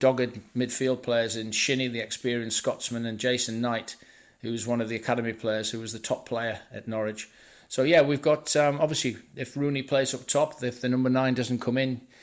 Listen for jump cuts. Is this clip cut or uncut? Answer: uncut